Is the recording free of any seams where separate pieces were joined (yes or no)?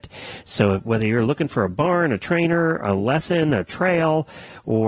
yes